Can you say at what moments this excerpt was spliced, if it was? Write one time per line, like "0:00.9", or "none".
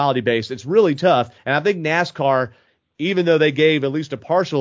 0:01.4